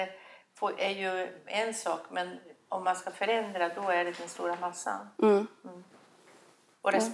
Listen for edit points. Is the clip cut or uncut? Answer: uncut